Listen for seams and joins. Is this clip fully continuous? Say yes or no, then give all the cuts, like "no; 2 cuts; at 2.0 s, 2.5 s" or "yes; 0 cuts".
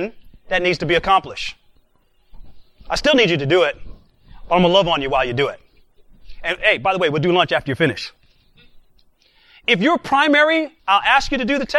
no; 1 cut; at 10.8 s